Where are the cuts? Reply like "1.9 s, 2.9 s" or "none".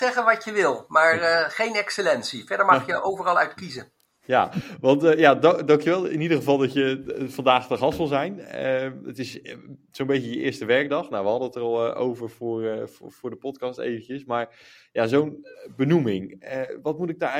none